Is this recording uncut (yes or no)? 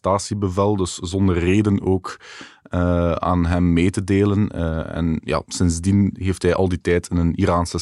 yes